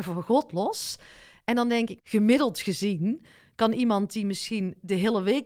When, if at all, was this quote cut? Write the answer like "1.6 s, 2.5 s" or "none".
2.0 s

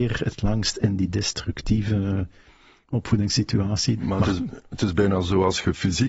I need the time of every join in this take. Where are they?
4.0 s

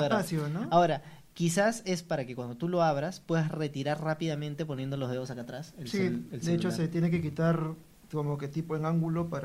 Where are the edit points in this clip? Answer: 1.3 s

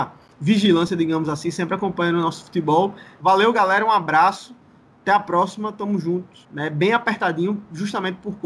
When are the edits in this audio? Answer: 3.2 s, 6.4 s

